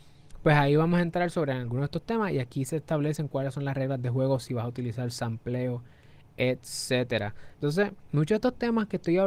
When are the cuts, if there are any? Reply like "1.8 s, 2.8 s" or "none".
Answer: 7.5 s

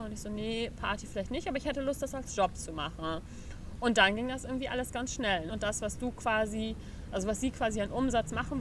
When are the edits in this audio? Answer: 5.5 s

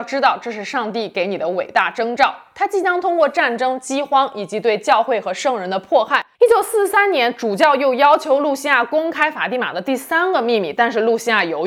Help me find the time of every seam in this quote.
6.3 s

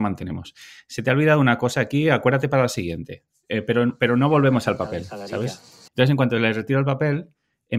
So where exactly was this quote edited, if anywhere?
5.9 s

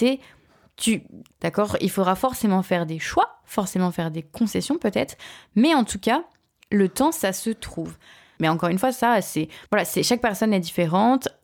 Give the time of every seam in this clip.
1.3 s, 8.4 s, 9.7 s

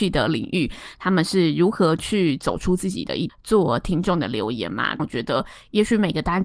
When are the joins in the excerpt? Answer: 3.3 s, 5.0 s

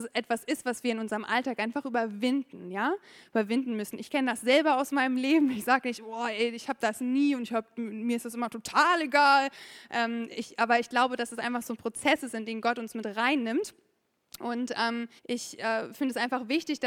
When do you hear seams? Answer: 15.2 s

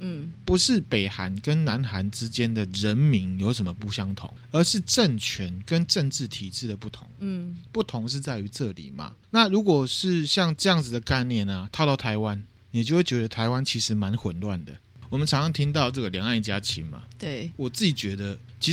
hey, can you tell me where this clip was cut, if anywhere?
none

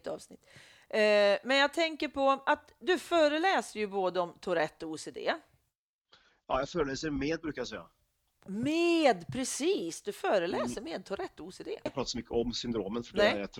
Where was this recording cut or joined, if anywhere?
11.9 s

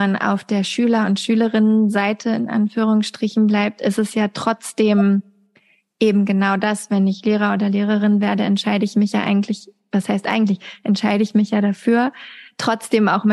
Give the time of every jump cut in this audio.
none

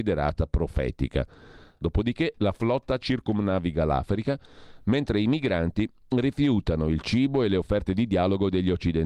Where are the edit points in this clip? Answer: 1.8 s

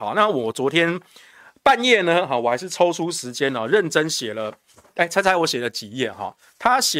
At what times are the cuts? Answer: none

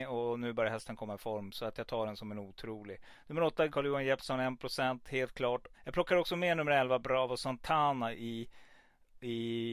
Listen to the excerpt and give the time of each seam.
3.7 s, 5.7 s

